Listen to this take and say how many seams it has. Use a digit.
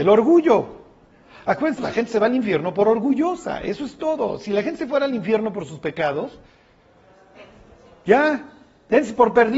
1